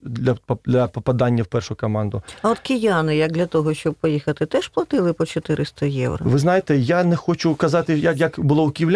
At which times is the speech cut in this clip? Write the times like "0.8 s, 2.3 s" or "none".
none